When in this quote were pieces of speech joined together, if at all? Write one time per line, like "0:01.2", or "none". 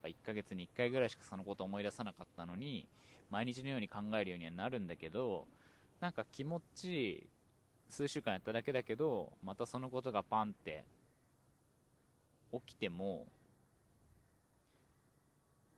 none